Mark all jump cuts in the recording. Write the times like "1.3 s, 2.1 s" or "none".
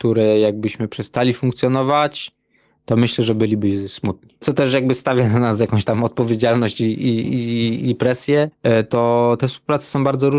8.5 s

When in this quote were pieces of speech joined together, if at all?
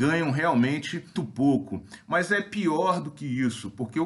1.2 s

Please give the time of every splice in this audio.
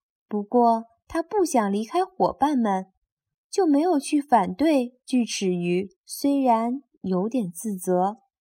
5.9 s

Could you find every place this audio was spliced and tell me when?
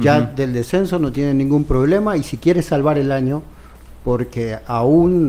none

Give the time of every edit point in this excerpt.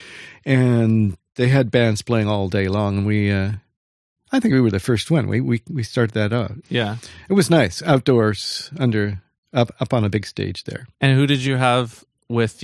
6.6 s, 10.9 s

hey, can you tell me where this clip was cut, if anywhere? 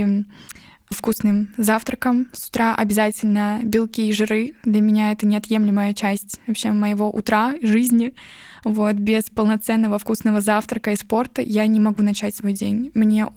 none

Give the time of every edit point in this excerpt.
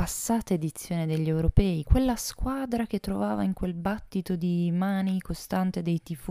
1.8 s

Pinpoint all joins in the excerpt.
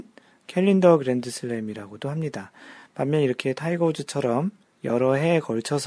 none

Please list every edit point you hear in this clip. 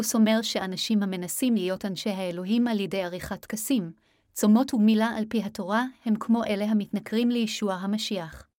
none

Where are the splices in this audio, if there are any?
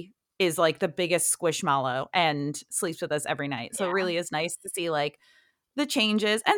none

